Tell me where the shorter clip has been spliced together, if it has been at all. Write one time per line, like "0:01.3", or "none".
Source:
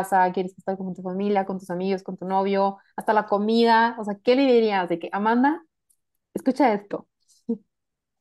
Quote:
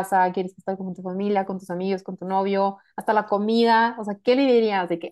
none